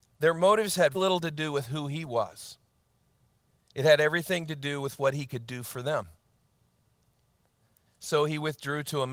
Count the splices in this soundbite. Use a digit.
1